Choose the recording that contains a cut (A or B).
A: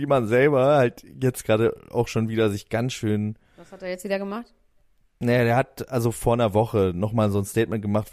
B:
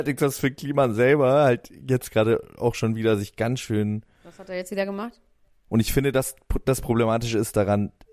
B